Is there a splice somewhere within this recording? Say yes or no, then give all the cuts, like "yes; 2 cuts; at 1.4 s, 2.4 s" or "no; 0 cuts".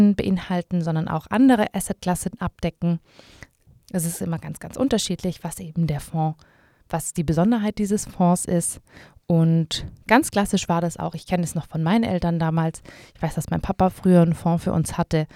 no; 0 cuts